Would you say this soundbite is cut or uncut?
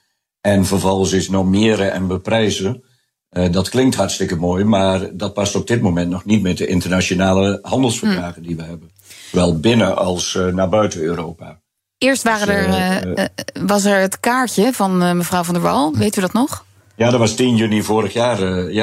uncut